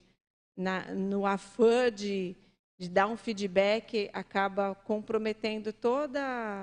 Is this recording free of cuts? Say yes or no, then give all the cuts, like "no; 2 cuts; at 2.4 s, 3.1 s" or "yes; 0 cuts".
yes; 0 cuts